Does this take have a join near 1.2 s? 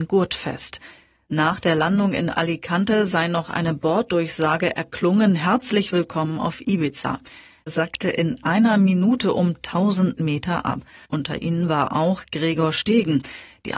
no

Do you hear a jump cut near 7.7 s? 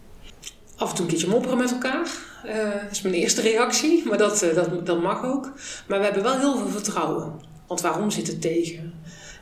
yes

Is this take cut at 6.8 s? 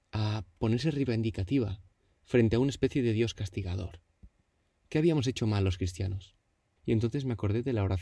yes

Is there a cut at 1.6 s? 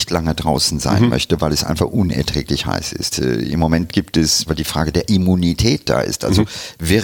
no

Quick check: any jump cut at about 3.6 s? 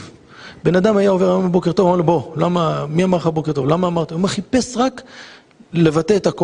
no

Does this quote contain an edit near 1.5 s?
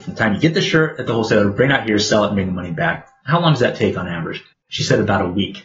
no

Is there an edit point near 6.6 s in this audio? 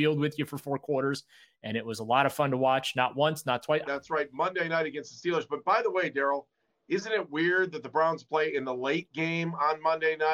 no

